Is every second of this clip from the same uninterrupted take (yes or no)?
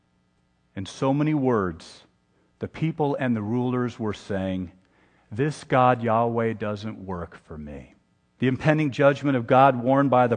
no